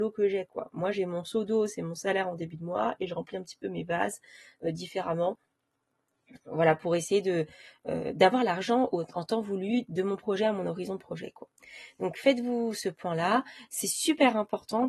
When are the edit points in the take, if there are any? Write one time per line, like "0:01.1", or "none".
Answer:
none